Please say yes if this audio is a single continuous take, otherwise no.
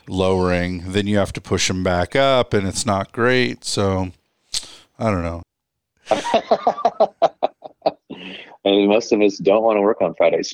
no